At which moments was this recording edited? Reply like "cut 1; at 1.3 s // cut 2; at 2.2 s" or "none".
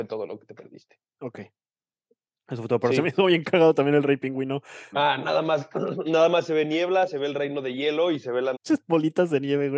cut 1; at 4.9 s // cut 2; at 8.6 s